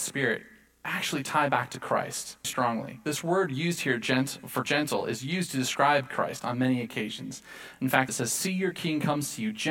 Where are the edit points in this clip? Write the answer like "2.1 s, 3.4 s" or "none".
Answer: 2.4 s, 8.1 s